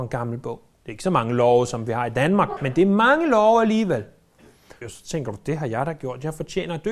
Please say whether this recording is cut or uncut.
cut